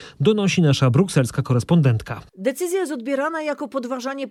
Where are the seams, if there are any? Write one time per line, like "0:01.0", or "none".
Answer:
0:02.3